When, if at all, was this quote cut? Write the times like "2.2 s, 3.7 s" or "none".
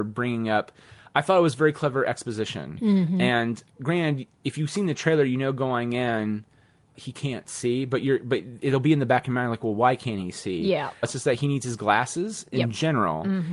11.0 s